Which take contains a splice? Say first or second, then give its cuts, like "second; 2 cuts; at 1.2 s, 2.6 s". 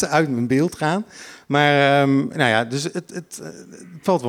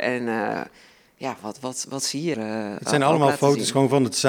second; 1 cut; at 2.3 s